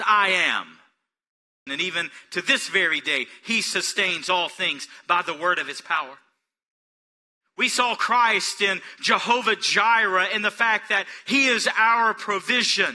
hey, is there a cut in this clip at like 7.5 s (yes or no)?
no